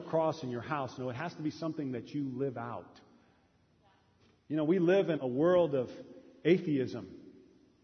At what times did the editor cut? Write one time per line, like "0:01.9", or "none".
0:05.2